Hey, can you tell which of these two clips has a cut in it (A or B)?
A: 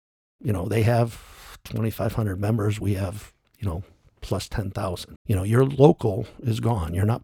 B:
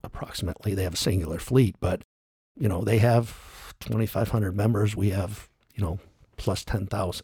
A